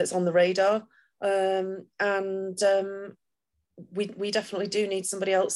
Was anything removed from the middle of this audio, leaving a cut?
no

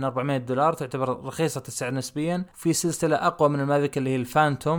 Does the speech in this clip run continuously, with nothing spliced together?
no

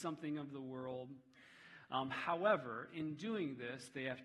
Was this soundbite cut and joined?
no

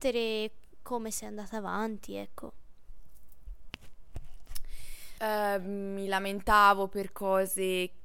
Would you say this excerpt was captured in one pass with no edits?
no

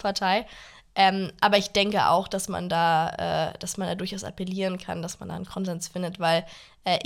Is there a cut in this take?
no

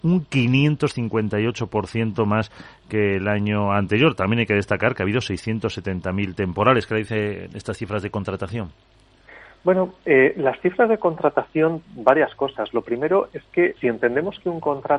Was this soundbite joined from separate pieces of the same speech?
yes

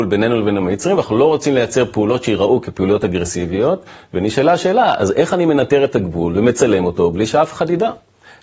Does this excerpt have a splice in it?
no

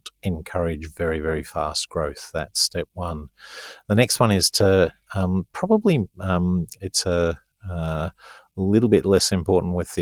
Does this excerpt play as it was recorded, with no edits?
yes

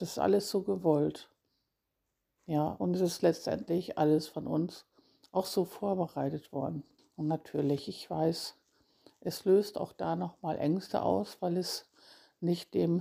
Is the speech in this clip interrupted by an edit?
yes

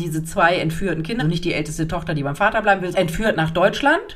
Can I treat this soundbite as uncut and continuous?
no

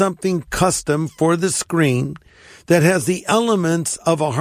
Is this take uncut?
yes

